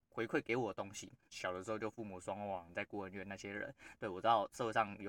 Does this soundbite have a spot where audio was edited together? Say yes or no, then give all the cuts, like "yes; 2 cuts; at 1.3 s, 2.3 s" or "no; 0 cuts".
yes; 2 cuts; at 1.3 s, 2.7 s